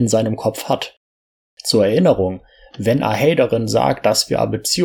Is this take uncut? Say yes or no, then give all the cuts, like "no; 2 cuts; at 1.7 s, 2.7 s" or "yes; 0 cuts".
yes; 0 cuts